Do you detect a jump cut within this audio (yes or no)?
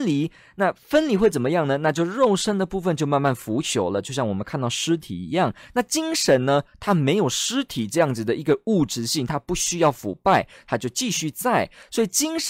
no